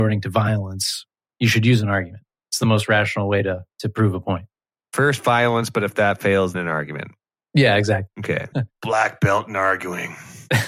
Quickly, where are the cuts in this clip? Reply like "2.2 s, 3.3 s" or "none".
2.4 s, 6.5 s, 8.5 s